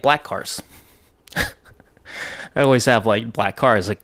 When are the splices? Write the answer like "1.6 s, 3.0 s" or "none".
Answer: none